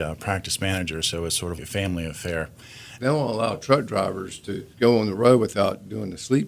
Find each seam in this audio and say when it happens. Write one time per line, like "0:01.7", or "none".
0:01.6
0:03.0
0:04.7